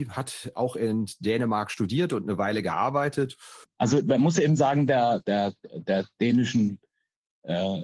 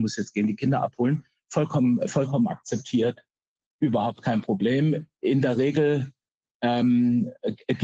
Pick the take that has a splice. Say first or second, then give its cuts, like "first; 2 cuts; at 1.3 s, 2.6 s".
first; 2 cuts; at 3.6 s, 5.2 s